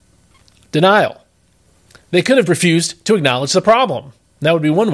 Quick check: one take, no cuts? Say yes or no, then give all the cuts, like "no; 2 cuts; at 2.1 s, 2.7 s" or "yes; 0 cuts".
no; 1 cut; at 2.5 s